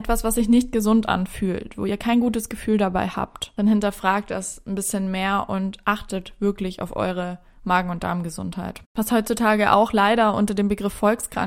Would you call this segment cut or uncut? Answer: cut